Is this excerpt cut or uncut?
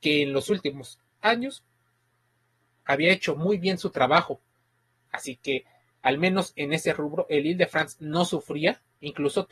cut